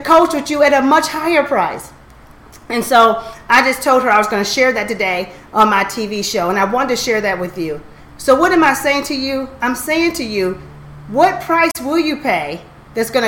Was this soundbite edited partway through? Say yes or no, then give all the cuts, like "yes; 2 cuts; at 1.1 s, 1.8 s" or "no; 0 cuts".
no; 0 cuts